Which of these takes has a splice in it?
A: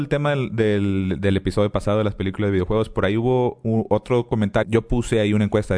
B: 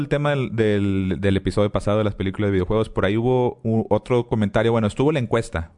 A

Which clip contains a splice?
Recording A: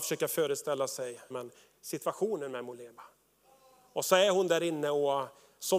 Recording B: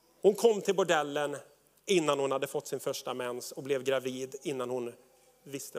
A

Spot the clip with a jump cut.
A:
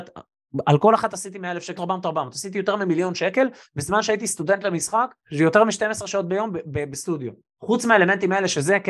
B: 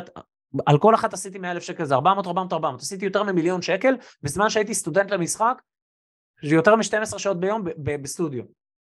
A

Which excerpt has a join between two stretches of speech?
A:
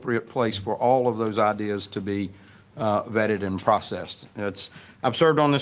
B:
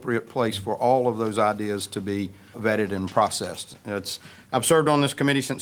B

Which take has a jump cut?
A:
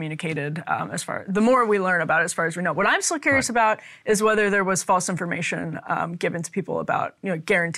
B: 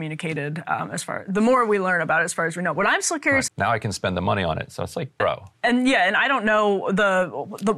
B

